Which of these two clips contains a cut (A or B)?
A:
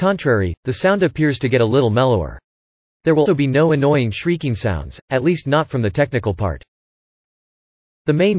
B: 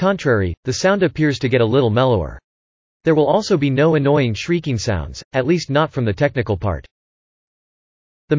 A